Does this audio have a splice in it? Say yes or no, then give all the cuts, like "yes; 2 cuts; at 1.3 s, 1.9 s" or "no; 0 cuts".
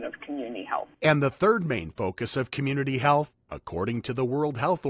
yes; 1 cut; at 0.9 s